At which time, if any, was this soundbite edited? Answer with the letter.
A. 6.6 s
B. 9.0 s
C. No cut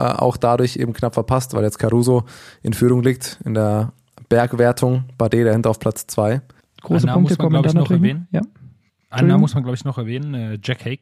A